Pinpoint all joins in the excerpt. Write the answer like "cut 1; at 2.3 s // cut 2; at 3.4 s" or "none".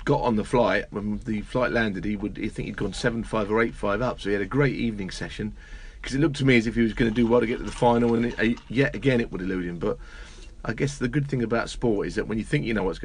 none